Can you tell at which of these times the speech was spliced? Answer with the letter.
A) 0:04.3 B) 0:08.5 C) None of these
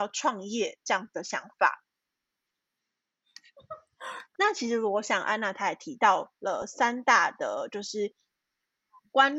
A